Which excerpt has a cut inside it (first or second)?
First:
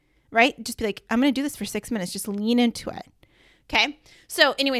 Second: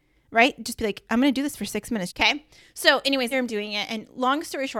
second